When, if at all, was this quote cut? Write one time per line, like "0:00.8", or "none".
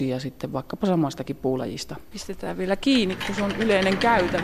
0:02.1

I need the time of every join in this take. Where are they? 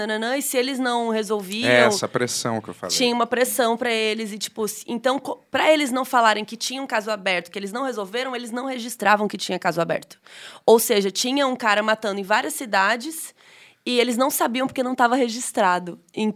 none

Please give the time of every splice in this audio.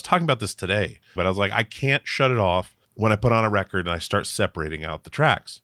0:01.2
0:02.8

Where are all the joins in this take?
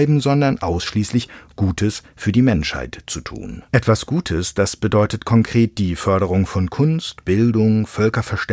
0:03.7

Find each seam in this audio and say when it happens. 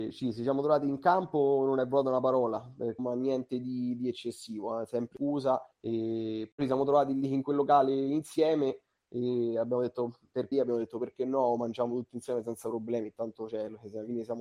0:03.0
0:05.7
0:10.5

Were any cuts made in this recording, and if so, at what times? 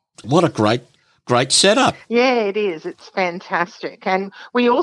none

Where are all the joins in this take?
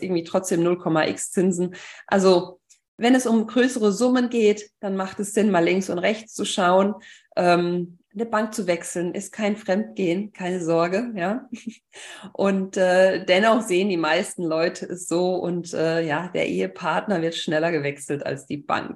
none

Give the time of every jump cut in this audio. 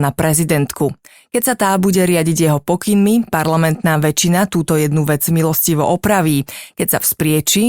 none

